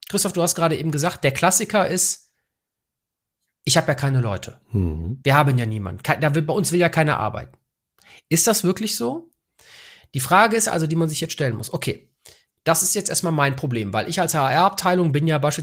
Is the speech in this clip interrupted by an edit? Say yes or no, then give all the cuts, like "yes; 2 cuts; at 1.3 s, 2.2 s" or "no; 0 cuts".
no; 0 cuts